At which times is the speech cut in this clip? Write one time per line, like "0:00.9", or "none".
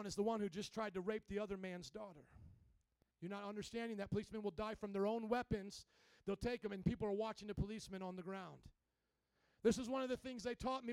0:03.1